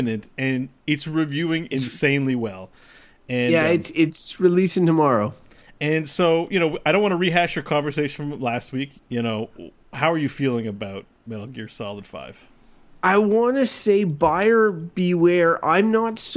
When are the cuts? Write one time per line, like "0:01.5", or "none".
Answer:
0:09.0